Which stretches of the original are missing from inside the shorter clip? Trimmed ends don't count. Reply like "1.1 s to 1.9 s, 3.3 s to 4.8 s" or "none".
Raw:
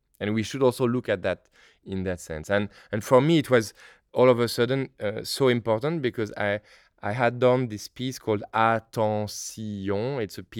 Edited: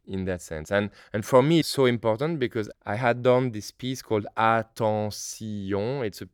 3.4 s to 5.2 s, 6.3 s to 6.9 s